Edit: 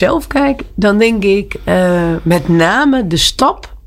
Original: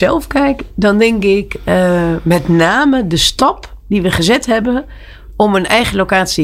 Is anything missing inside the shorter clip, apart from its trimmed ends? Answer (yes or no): no